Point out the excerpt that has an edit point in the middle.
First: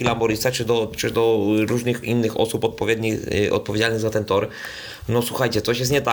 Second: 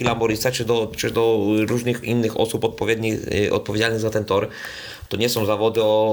second; 1 cut; at 5.1 s

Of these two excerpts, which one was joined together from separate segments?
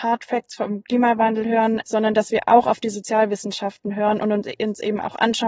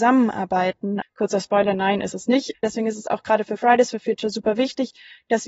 second; 2 cuts; at 1.0 s, 2.5 s

